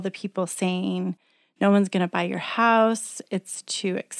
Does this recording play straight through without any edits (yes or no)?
yes